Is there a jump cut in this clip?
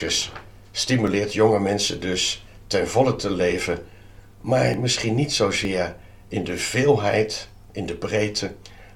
no; 0 cuts

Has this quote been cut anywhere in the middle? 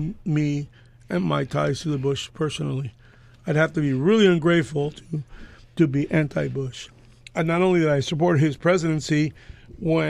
no; 0 cuts

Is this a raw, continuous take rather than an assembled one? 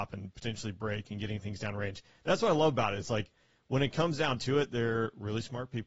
yes; 0 cuts

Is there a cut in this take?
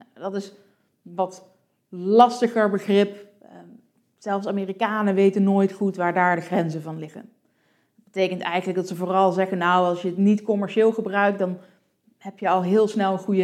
no; 0 cuts

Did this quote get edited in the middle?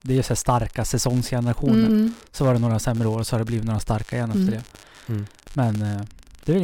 yes; 1 cut; at 1.9 s

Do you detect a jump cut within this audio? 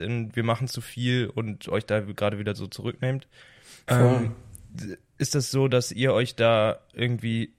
yes; 1 cut; at 3.9 s

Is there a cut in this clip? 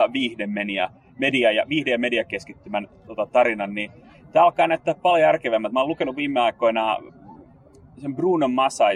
no; 0 cuts

